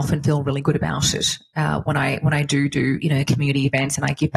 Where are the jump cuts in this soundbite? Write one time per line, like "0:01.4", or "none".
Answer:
none